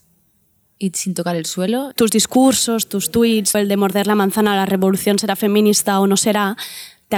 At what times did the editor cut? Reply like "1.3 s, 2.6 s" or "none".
1.9 s, 3.5 s